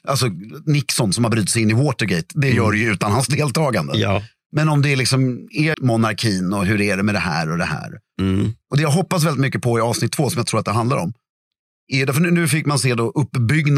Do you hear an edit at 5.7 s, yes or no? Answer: yes